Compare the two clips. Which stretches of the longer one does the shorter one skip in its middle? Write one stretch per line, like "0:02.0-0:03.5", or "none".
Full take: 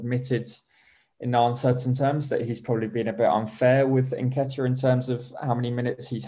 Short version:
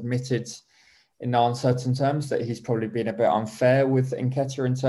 none